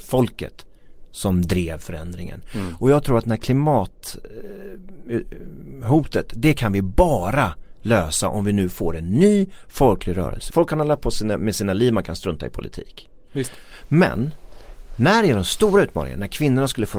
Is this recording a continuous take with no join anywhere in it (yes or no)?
no